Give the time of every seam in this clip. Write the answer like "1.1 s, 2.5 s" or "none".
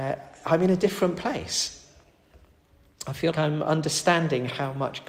3.3 s

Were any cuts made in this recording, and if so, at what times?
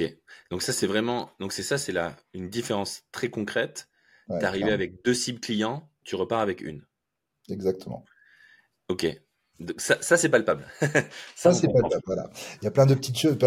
none

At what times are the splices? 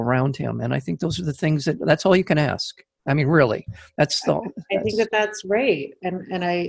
none

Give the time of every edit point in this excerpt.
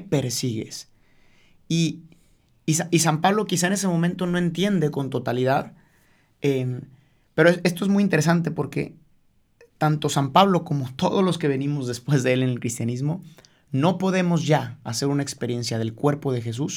none

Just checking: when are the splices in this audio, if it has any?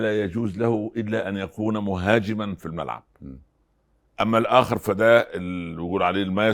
none

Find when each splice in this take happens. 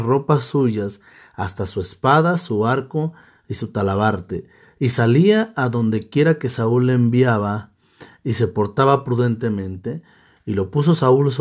none

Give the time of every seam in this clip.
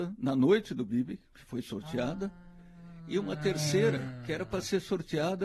none

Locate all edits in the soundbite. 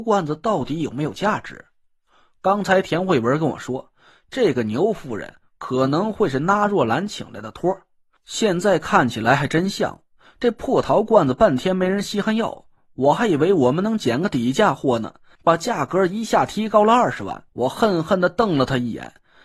15.3 s, 17.5 s

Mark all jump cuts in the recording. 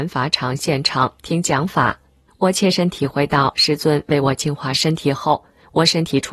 2.3 s

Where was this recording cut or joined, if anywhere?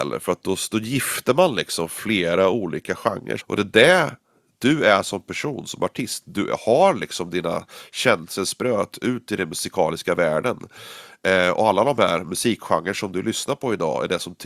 3.4 s

